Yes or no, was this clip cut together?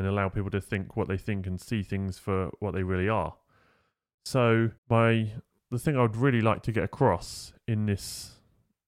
yes